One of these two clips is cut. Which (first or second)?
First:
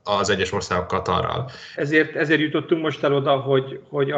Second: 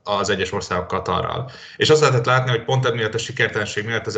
first